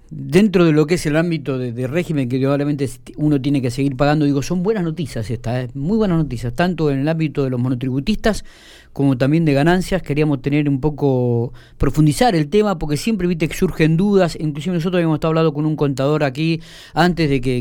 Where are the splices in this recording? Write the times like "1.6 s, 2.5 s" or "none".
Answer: none